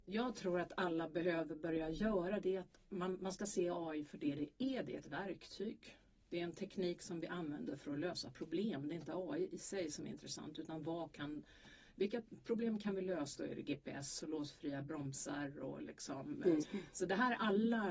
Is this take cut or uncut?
cut